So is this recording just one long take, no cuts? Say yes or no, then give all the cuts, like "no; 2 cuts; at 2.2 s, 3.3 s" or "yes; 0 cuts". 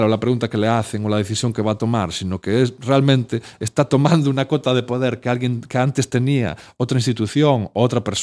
yes; 0 cuts